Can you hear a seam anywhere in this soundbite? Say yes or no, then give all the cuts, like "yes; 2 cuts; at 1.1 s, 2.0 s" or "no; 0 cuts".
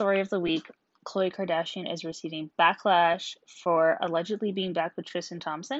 no; 0 cuts